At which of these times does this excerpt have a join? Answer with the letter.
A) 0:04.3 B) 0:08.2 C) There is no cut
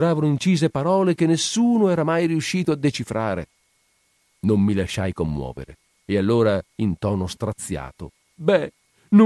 B